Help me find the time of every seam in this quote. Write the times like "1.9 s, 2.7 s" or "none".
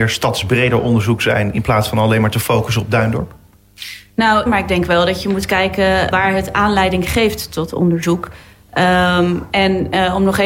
4.5 s, 6.1 s